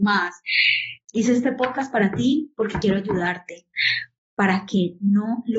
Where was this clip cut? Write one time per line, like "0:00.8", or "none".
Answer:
0:01.0